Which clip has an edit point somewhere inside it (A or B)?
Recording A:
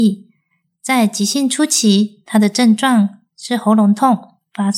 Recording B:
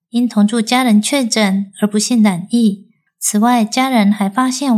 B